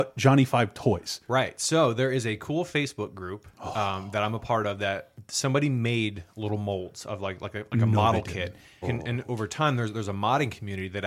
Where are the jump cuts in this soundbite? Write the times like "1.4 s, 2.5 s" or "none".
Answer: 8.8 s